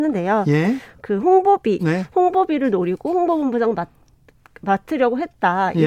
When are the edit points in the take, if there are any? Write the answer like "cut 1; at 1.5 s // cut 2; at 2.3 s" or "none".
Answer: cut 1; at 1.8 s